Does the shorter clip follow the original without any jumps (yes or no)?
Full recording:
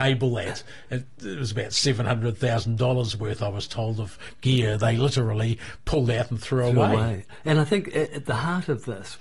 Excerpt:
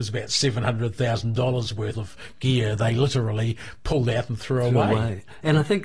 no